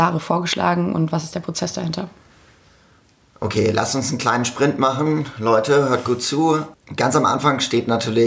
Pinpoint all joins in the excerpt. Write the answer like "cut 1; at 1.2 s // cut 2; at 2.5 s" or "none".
cut 1; at 6.7 s